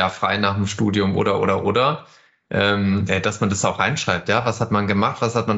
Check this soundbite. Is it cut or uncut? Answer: uncut